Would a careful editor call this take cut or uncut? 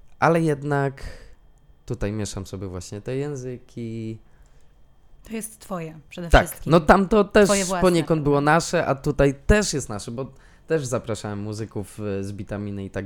cut